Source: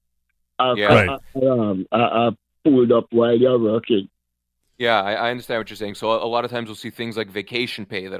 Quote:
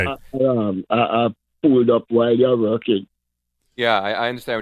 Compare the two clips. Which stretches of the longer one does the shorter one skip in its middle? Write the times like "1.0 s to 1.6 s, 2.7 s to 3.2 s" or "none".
none